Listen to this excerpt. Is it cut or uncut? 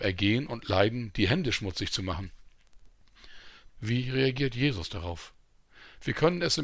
cut